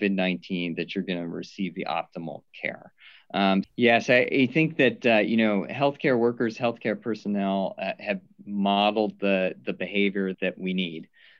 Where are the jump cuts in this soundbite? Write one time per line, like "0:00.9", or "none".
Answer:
0:03.6
0:10.3